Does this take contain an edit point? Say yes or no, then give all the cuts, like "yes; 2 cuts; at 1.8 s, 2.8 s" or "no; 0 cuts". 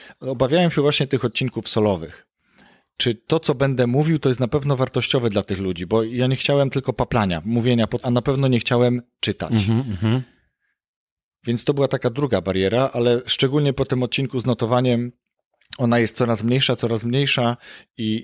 yes; 1 cut; at 8.0 s